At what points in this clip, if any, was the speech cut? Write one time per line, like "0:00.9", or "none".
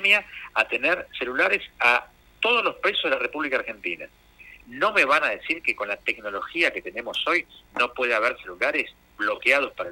0:04.6